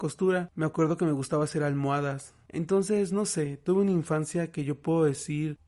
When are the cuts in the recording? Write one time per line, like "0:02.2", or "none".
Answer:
0:02.5